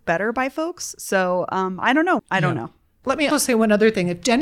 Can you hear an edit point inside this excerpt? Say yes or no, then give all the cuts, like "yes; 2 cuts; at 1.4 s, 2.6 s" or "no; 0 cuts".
yes; 2 cuts; at 2.2 s, 3.3 s